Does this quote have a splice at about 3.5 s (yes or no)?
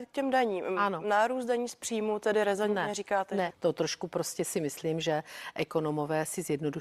yes